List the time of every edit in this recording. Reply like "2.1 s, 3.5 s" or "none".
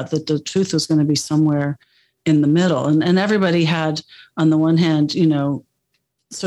none